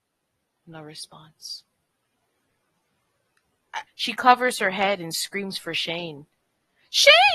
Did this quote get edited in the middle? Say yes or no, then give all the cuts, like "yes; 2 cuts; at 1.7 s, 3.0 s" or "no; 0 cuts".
yes; 1 cut; at 3.9 s